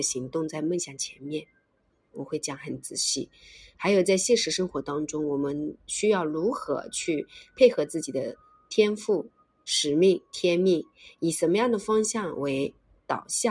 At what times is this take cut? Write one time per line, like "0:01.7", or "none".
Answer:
0:02.1